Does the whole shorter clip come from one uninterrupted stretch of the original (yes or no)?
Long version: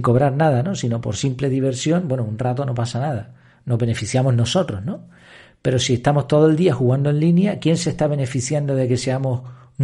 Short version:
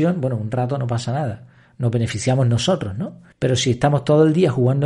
no